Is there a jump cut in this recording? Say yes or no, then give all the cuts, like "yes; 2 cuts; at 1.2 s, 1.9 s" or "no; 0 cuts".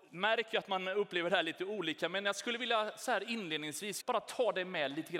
yes; 1 cut; at 4.0 s